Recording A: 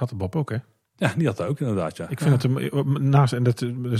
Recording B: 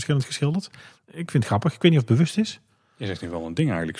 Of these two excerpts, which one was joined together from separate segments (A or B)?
B